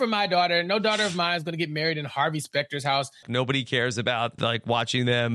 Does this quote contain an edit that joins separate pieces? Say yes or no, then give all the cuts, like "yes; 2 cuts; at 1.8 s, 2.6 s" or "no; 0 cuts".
yes; 2 cuts; at 3.2 s, 4.4 s